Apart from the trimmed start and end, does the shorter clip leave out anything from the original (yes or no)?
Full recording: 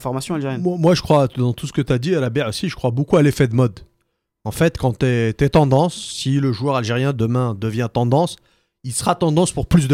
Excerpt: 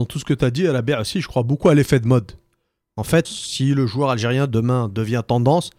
yes